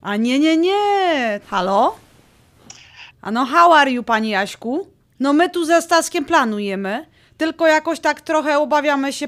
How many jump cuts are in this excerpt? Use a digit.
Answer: 3